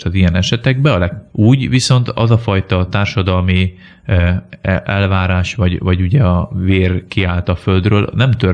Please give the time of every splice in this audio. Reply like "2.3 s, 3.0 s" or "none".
1.3 s, 6.5 s